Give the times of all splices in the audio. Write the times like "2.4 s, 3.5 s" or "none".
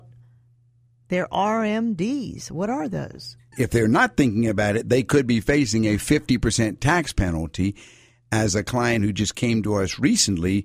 3.5 s